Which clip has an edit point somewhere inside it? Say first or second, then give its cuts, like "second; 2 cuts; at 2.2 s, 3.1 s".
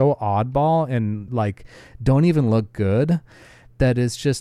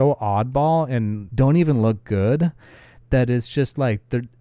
second; 1 cut; at 1.3 s